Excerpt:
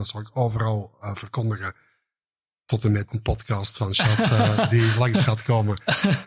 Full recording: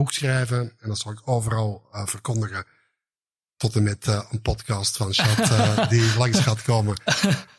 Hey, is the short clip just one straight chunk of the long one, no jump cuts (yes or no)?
no